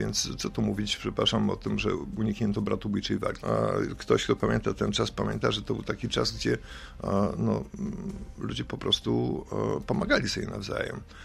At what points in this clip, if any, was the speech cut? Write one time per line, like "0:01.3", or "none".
0:03.4